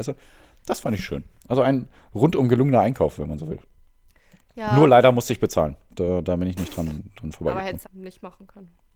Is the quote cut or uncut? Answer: cut